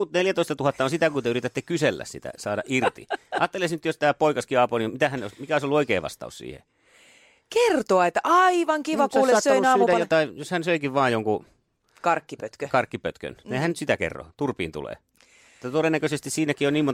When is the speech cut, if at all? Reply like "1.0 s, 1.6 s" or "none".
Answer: none